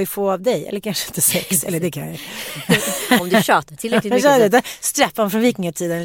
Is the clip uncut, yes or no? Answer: yes